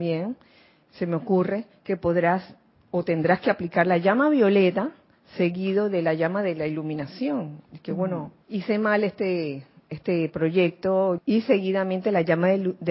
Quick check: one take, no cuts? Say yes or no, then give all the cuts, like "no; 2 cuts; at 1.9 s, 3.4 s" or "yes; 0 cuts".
no; 2 cuts; at 8.4 s, 11.2 s